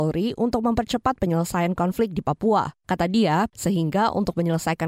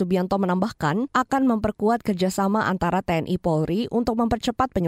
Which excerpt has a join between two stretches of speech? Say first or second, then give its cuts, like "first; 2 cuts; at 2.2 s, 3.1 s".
first; 1 cut; at 3.5 s